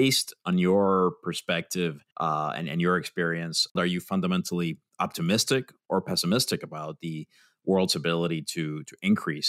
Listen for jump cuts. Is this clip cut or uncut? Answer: cut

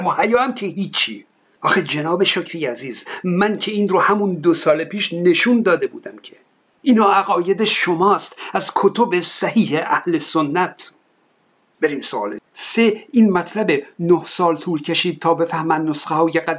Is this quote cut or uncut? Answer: cut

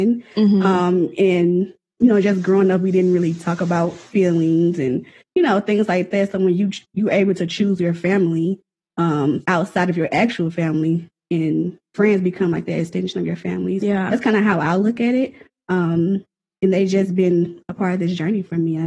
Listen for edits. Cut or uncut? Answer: cut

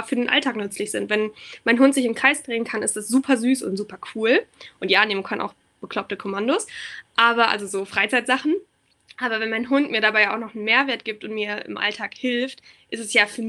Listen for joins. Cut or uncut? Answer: uncut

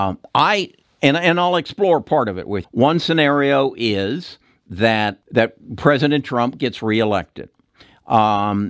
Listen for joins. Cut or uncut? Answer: cut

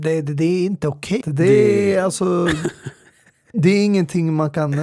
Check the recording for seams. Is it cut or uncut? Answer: cut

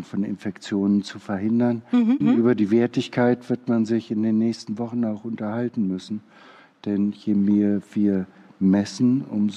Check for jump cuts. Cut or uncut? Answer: cut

